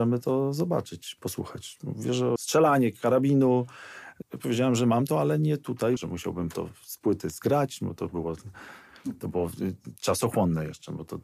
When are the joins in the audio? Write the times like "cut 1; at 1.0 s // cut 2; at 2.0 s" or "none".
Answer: cut 1; at 2.4 s // cut 2; at 4.2 s // cut 3; at 6.0 s